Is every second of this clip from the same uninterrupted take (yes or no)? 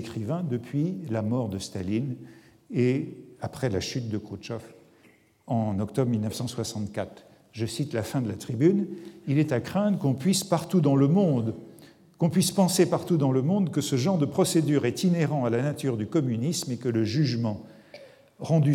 yes